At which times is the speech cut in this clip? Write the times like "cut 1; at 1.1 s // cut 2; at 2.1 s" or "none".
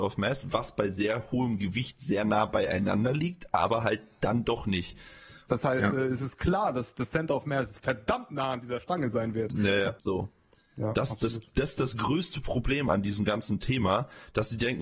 cut 1; at 5.5 s // cut 2; at 10.0 s